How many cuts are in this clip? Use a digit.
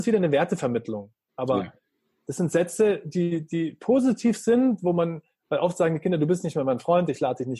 0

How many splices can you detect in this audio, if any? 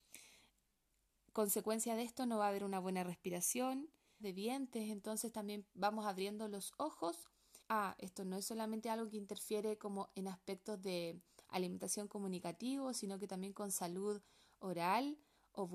2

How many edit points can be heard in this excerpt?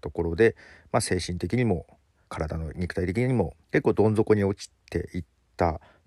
2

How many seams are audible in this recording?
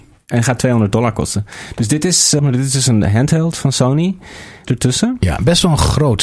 2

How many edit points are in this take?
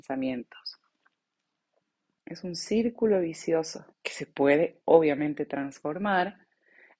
2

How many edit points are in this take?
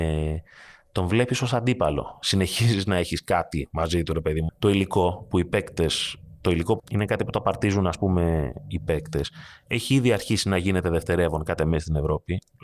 2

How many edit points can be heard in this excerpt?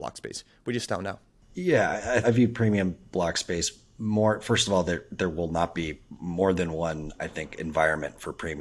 1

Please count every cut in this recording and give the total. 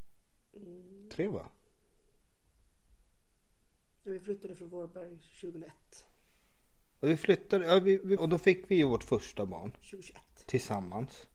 1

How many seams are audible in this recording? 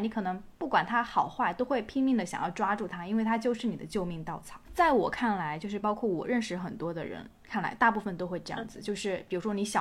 1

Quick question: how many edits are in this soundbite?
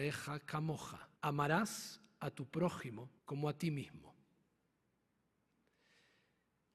2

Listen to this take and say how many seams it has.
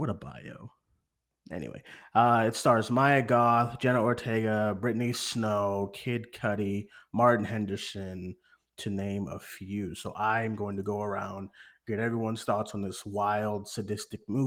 0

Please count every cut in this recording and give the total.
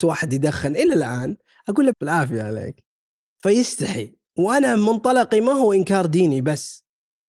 1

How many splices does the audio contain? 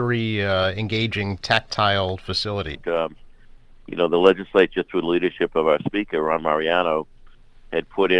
1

